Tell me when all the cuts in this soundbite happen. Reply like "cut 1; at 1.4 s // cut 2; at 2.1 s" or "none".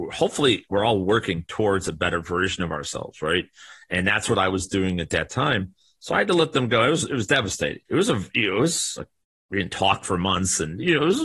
cut 1; at 7.9 s